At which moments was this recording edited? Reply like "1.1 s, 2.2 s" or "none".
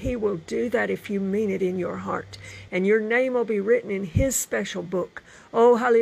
2.7 s